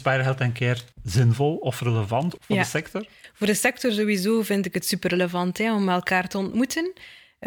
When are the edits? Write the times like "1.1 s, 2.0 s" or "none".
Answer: 0.9 s, 2.4 s